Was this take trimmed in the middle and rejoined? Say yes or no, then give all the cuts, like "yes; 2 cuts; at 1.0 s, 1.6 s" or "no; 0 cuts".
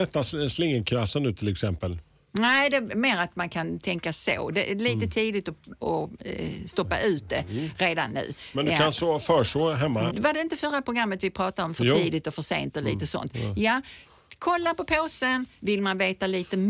yes; 2 cuts; at 10.1 s, 15.6 s